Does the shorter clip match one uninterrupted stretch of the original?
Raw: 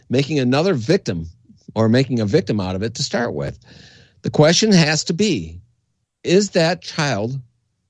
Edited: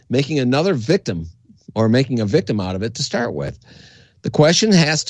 yes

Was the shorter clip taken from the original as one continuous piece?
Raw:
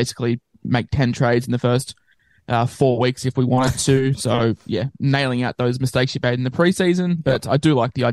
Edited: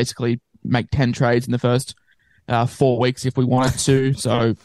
yes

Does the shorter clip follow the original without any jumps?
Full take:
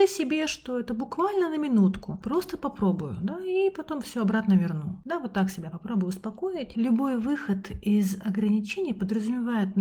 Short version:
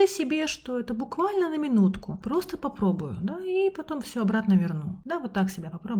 yes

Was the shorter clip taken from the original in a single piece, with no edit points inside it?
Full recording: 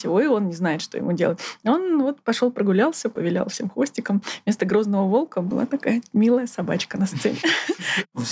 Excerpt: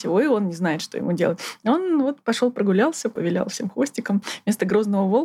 yes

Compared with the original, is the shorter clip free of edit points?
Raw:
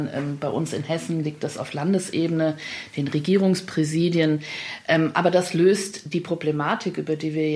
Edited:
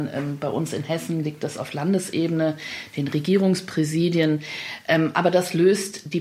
yes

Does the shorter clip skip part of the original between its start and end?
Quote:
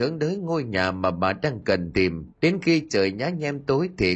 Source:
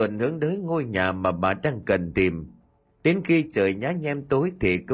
yes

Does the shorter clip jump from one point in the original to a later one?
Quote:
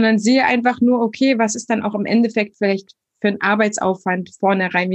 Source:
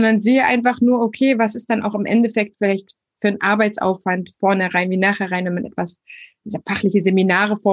no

